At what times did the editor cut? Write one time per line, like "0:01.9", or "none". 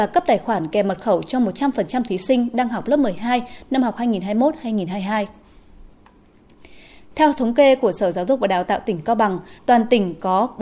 0:09.6